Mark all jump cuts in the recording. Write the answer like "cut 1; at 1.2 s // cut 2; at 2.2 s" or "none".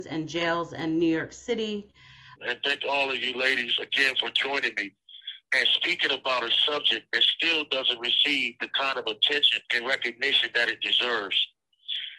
cut 1; at 2.4 s // cut 2; at 9.6 s